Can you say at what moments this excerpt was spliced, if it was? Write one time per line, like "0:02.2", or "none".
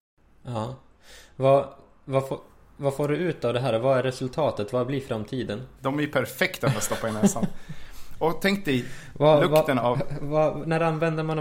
0:05.8